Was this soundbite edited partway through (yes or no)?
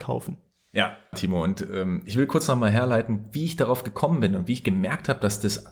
yes